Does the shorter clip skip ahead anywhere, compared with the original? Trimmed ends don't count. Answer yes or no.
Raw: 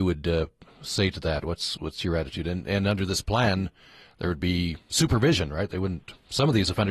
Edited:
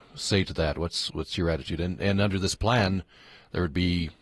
no